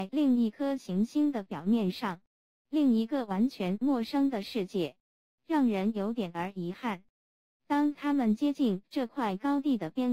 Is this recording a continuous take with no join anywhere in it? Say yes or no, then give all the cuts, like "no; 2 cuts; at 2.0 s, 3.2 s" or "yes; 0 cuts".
no; 2 cuts; at 5.2 s, 7.6 s